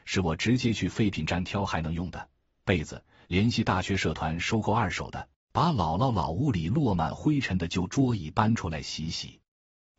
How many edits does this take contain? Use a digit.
1